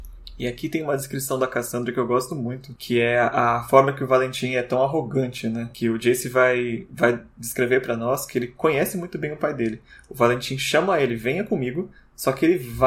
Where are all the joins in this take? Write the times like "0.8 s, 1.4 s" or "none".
none

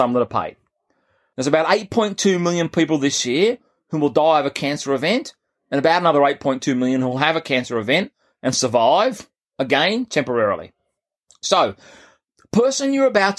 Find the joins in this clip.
1.3 s

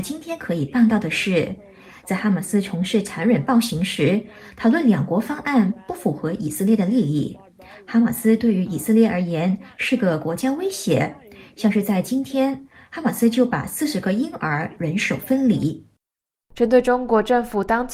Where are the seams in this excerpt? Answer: none

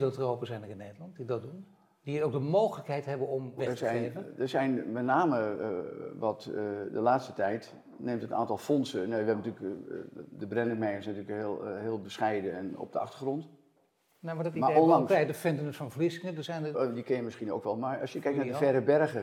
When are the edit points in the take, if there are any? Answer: 3.6 s, 16.7 s

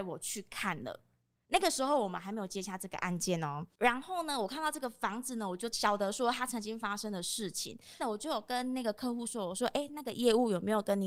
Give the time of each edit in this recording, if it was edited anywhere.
8.0 s

